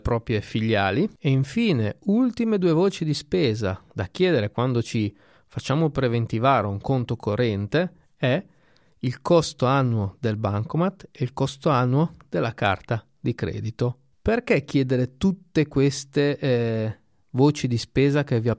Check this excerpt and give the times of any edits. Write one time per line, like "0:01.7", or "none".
none